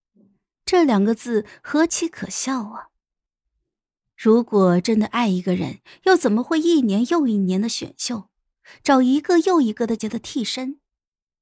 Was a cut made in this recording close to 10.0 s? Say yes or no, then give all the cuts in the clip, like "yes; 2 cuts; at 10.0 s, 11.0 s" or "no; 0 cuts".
yes; 1 cut; at 10.0 s